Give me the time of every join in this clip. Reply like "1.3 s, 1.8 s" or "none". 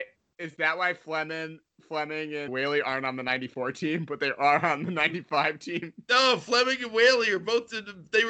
2.5 s